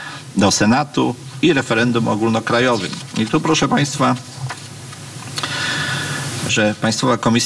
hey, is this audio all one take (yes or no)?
no